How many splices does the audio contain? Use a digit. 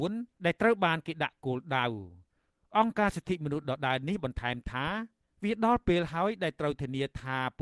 0